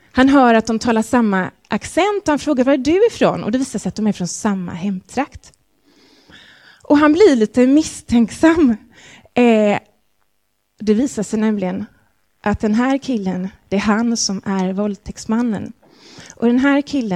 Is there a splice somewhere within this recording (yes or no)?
no